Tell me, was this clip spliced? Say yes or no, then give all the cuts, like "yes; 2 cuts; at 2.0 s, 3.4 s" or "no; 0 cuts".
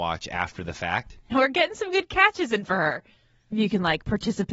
yes; 2 cuts; at 1.3 s, 3.5 s